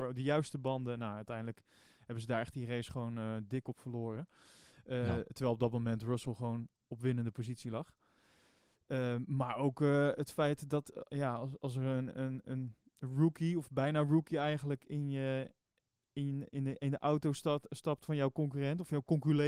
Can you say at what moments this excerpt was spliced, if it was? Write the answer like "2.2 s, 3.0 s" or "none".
none

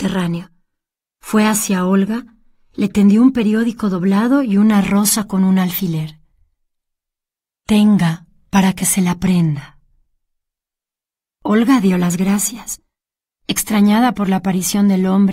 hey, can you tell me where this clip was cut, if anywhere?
7.5 s

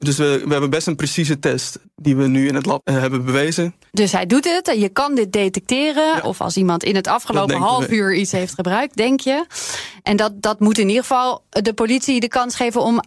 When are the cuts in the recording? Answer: 3.9 s, 6.2 s

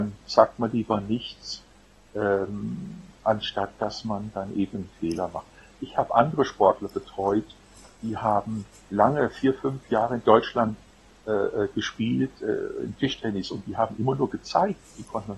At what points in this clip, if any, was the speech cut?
none

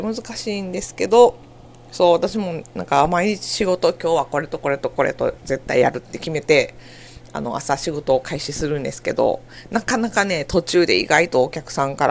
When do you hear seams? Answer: none

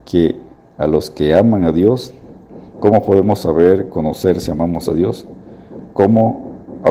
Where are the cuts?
none

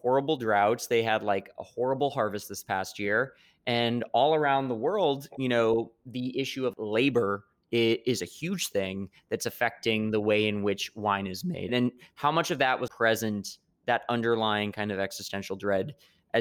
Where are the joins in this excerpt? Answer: 11.7 s, 12.9 s

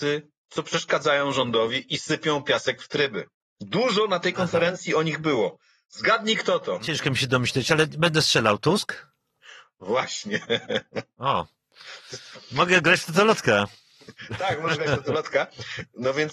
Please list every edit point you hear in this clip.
none

